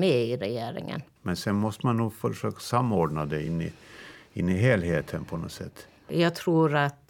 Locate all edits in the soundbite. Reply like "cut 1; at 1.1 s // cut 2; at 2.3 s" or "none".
cut 1; at 1.2 s